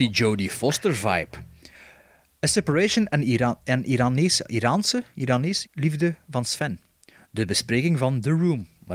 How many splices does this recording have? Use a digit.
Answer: 1